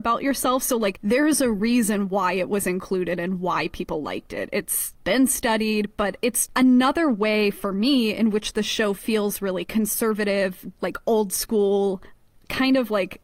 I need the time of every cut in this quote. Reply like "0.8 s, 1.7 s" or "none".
6.5 s, 10.8 s